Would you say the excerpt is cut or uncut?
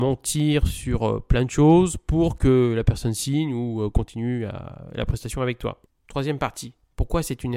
uncut